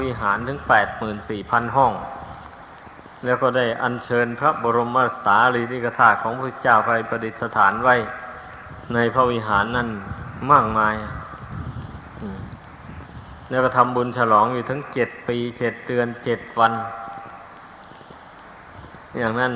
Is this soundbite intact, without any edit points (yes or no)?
yes